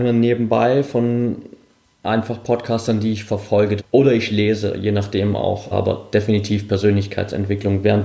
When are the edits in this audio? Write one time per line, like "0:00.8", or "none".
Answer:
0:03.8
0:05.7